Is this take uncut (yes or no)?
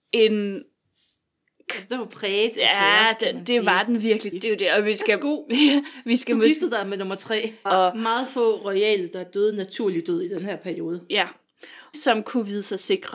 no